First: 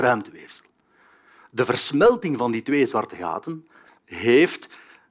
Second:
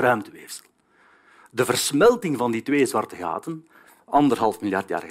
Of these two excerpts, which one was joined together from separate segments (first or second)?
first